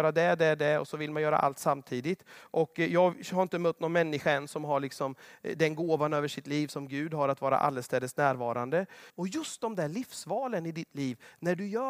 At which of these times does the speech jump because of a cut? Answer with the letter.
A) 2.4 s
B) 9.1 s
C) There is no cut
B